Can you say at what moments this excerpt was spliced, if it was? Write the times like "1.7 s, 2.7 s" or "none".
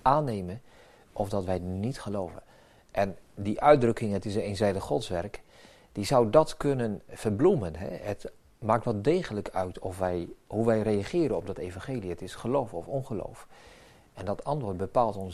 7.1 s